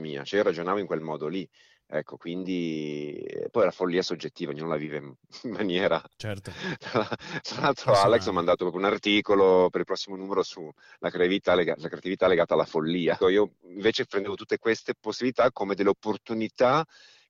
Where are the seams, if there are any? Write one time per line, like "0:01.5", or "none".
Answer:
0:13.2